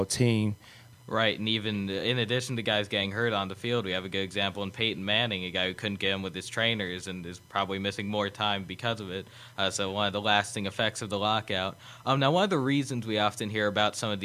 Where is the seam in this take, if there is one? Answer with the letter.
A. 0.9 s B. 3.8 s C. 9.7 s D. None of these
A